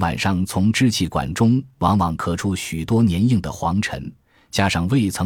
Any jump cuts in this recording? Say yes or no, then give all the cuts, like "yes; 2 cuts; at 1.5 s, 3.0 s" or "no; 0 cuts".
no; 0 cuts